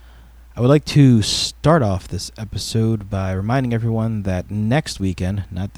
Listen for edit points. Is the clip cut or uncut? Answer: uncut